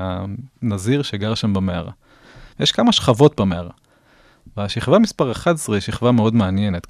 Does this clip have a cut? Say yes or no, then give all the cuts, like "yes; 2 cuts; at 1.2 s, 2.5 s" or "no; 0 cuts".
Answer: no; 0 cuts